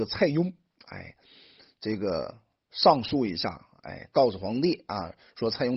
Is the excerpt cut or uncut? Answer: uncut